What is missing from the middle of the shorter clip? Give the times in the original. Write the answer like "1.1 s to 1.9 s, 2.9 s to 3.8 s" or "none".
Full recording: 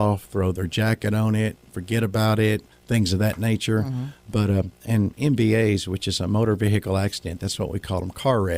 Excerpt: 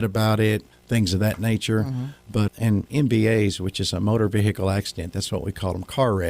4.5 s to 4.8 s